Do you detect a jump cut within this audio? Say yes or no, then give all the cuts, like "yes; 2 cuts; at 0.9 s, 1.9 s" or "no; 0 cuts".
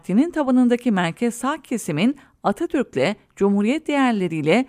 no; 0 cuts